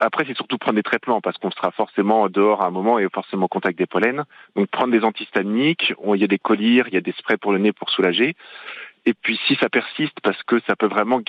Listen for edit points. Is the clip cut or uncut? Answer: uncut